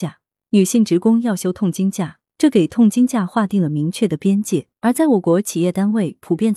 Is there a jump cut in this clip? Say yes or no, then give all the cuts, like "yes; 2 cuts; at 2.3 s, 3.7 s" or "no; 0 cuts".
yes; 2 cuts; at 2.3 s, 4.7 s